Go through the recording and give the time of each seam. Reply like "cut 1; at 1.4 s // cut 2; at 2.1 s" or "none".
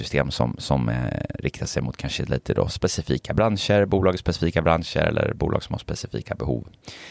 none